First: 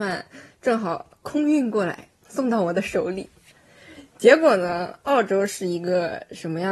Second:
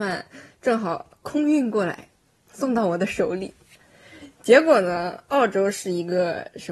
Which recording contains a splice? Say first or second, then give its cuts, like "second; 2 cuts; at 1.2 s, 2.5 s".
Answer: first; 1 cut; at 2.2 s